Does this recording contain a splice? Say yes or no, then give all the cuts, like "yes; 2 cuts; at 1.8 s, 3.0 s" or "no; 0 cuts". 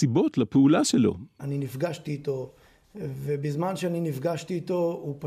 yes; 1 cut; at 1.4 s